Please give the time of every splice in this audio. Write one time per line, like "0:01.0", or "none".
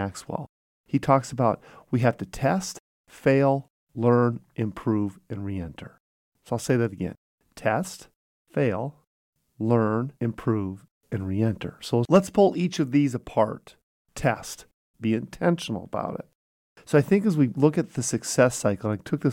0:10.2
0:14.9